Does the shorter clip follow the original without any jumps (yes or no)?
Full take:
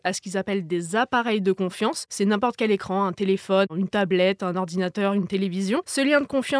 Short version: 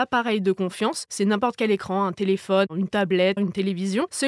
no